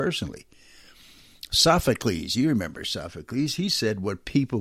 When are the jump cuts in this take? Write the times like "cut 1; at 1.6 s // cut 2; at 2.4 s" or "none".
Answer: none